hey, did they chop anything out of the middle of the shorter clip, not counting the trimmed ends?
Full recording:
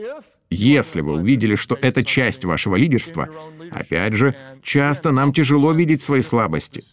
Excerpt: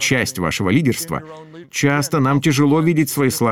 yes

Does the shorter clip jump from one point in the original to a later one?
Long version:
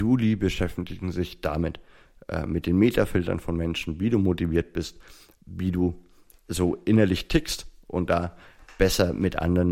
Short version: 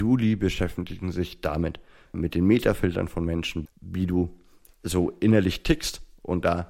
yes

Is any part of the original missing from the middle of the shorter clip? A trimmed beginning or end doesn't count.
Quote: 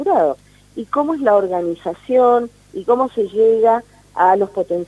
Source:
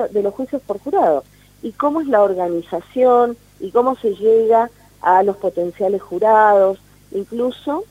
no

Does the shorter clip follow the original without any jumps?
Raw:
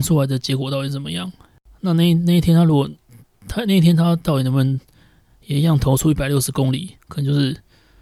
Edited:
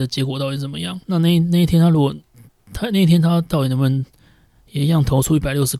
no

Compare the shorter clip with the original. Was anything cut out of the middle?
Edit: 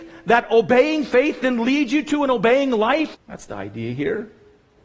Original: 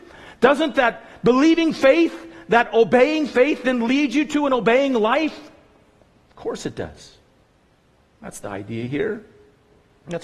yes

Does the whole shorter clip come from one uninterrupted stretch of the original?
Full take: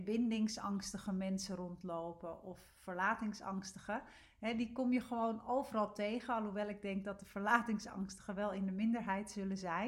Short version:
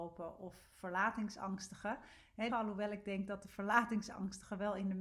no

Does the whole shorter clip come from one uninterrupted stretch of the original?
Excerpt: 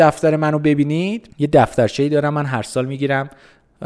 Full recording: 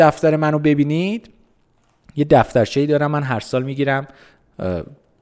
no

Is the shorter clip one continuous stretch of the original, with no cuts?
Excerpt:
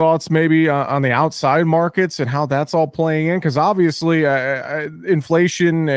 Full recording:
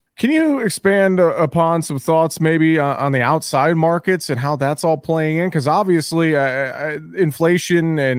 yes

